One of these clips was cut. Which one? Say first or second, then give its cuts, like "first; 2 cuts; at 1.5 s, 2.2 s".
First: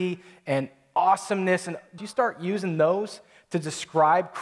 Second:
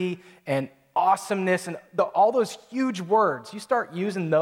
first; 1 cut; at 2.0 s